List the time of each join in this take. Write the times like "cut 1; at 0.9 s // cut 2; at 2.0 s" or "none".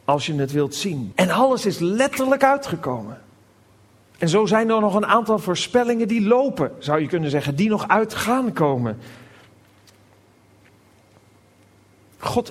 cut 1; at 1.1 s